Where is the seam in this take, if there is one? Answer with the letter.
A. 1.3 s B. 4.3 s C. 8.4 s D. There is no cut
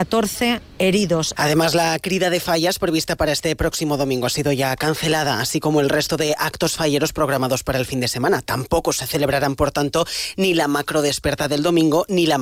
A